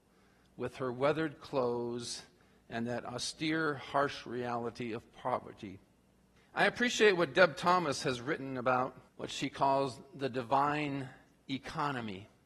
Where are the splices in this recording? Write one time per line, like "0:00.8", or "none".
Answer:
0:06.4
0:09.1